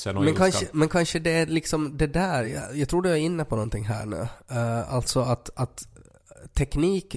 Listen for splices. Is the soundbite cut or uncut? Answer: uncut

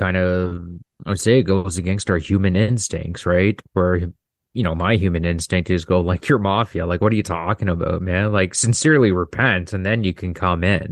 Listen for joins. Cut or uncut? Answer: uncut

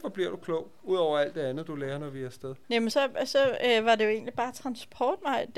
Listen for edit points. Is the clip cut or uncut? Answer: uncut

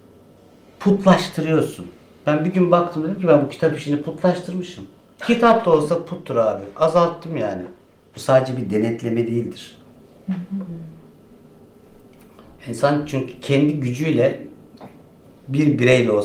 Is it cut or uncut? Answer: cut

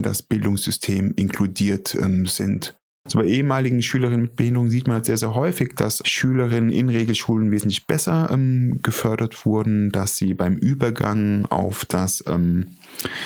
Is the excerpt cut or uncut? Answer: cut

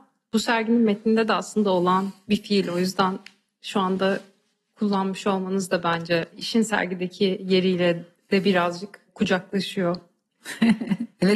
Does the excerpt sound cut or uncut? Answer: uncut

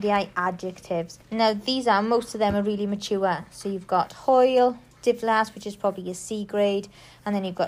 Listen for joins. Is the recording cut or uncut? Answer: cut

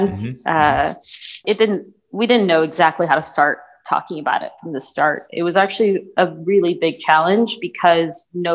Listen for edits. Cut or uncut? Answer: cut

